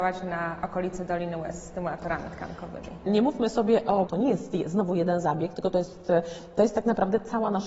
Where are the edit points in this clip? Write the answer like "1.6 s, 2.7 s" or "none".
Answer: 3.1 s, 4.1 s